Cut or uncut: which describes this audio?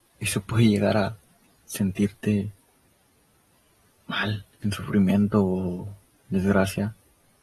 uncut